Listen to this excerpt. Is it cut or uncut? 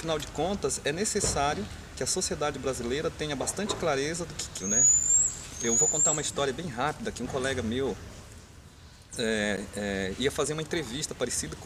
cut